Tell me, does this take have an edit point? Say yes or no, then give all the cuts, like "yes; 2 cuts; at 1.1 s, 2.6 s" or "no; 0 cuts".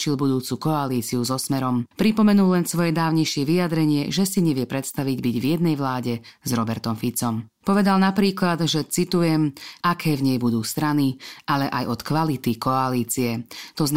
yes; 2 cuts; at 7.5 s, 9.8 s